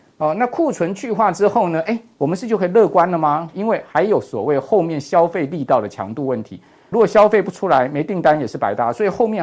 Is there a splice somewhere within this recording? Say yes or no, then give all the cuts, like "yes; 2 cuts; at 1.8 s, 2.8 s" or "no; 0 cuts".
yes; 2 cuts; at 3.5 s, 6.9 s